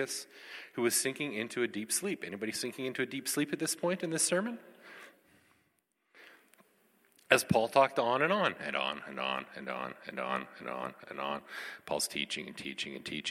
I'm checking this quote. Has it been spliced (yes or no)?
no